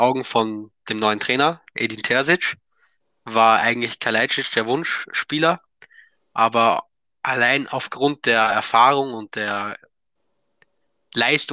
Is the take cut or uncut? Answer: uncut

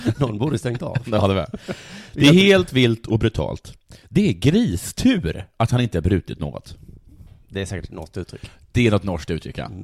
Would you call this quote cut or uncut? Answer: uncut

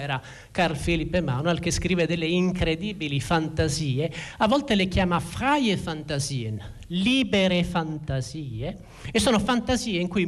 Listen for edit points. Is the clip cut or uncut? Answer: uncut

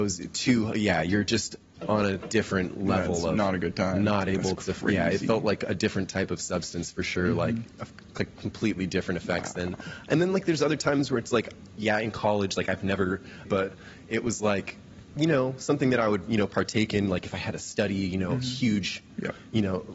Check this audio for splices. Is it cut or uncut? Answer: cut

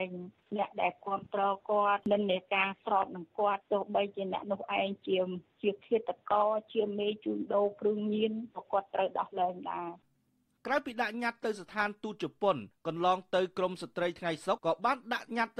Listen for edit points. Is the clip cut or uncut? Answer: cut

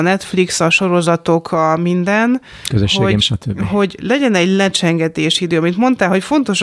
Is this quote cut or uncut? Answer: cut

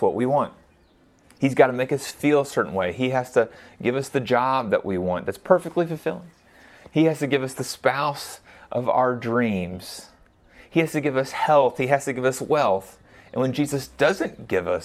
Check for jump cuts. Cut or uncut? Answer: uncut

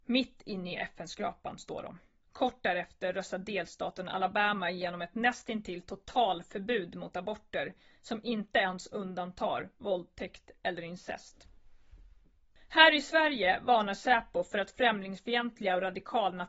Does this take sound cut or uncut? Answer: cut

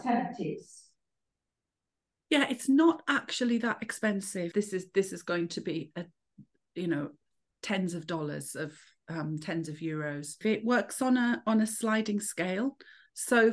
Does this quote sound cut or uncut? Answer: cut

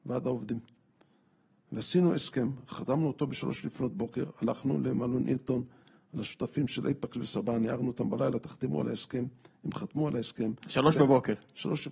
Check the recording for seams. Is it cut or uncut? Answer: uncut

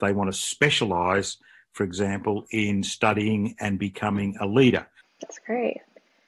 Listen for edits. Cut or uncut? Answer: cut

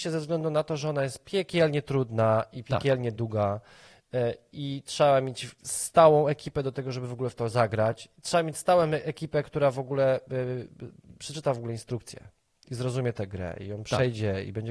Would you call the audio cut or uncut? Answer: uncut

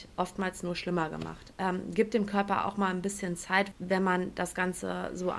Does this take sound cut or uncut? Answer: cut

